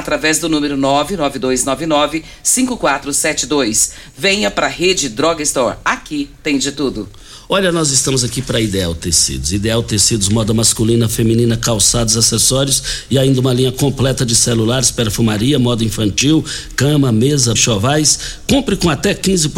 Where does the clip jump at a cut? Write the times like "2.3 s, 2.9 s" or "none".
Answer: 17.6 s